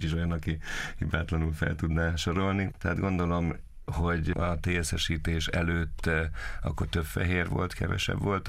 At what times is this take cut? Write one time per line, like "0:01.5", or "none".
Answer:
0:02.7

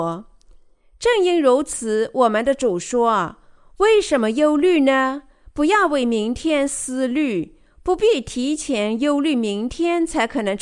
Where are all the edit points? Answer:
none

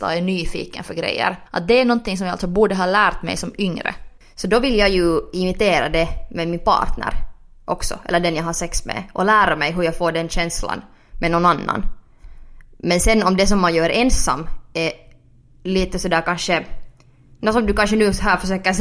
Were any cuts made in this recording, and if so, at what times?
0:01.5
0:04.2

